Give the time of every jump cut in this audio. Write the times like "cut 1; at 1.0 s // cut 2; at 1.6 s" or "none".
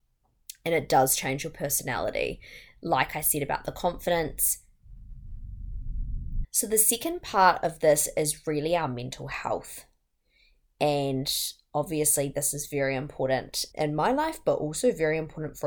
none

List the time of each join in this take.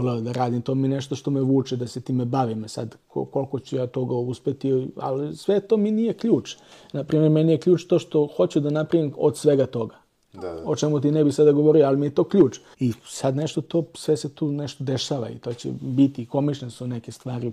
cut 1; at 12.7 s

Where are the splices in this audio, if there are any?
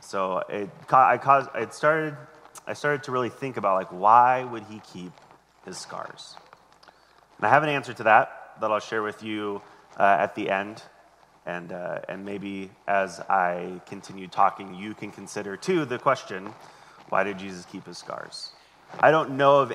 none

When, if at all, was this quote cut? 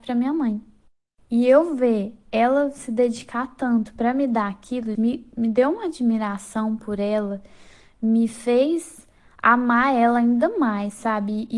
cut 1; at 4.9 s

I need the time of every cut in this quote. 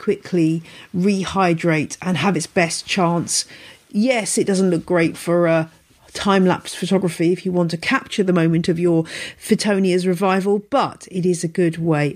none

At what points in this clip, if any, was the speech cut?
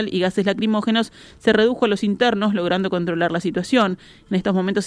none

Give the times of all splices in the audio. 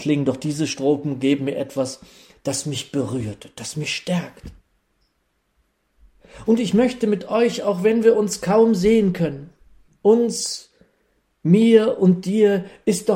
cut 1; at 9.9 s

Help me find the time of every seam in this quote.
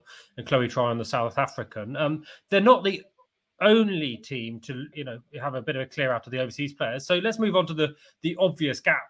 cut 1; at 4.9 s

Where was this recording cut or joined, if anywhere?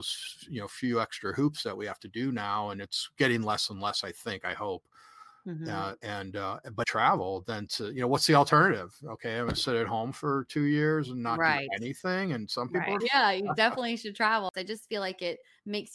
cut 1; at 6.8 s // cut 2; at 13.0 s // cut 3; at 14.5 s

